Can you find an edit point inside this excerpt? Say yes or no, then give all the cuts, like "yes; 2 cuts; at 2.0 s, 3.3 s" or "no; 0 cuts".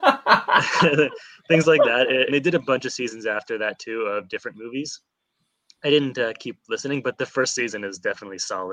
yes; 1 cut; at 2.3 s